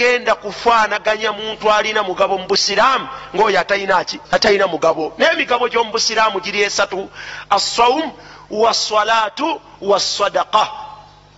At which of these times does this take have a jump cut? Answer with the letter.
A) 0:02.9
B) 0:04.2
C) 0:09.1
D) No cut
B